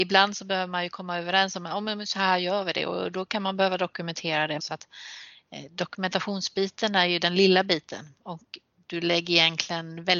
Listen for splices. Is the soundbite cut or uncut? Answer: cut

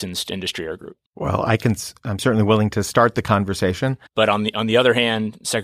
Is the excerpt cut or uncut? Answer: cut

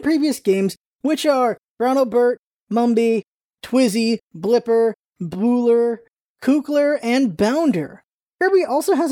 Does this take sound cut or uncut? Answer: uncut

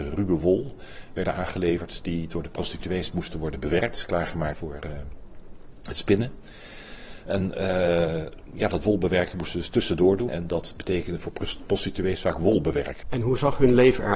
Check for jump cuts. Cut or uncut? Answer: cut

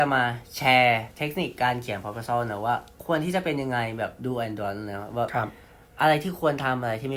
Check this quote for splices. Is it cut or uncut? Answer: uncut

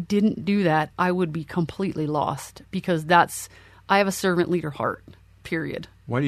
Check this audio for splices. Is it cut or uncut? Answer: uncut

